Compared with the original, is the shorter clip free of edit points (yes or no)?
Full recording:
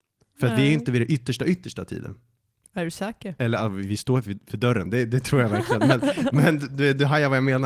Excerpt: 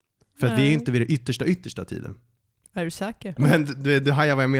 no